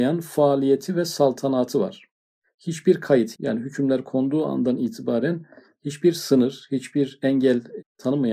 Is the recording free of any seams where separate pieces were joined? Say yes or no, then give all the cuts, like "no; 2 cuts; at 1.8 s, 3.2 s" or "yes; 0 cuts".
no; 1 cut; at 3.3 s